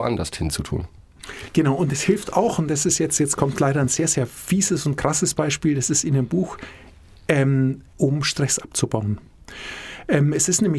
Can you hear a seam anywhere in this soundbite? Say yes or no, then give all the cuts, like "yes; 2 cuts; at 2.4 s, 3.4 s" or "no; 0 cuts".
yes; 1 cut; at 7.9 s